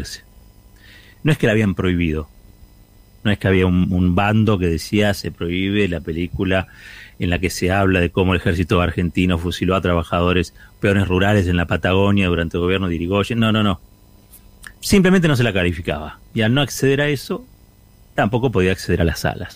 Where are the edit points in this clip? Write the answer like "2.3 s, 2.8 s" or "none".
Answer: 14.8 s, 16.2 s